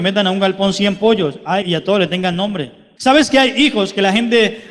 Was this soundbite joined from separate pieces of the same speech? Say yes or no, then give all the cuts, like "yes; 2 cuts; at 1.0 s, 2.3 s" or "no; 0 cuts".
yes; 2 cuts; at 1.6 s, 3.0 s